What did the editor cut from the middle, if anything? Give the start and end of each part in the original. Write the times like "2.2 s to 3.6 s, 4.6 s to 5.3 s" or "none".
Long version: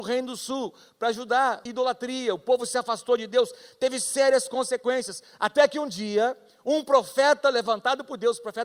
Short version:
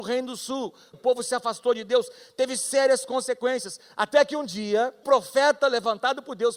0.9 s to 2.4 s, 6.5 s to 6.8 s